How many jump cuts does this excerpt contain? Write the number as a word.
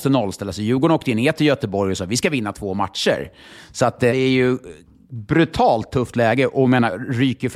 one